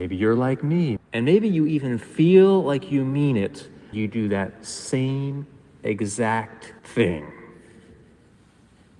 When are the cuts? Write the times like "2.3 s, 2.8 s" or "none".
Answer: 1.0 s, 3.9 s, 6.8 s